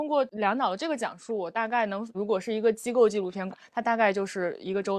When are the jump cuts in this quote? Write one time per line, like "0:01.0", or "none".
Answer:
0:02.1
0:03.5